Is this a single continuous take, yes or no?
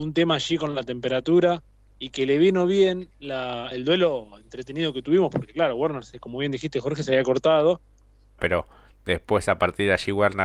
no